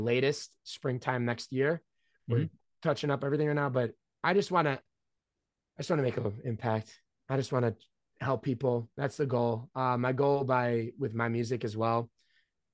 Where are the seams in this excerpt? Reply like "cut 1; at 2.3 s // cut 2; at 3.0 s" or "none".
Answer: none